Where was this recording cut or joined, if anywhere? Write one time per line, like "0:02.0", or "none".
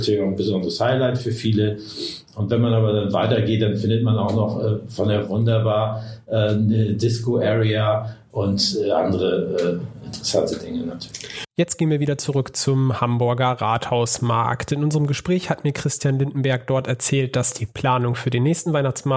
0:11.5